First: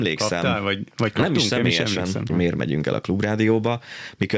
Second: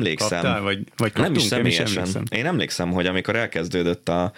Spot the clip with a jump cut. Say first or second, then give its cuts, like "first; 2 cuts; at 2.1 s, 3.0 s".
first; 1 cut; at 2.3 s